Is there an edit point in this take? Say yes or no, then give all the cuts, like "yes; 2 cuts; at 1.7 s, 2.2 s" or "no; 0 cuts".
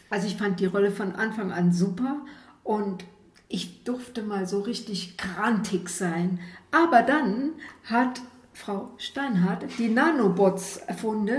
no; 0 cuts